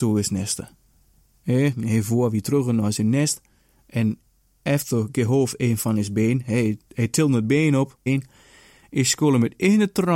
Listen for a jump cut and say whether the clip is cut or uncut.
cut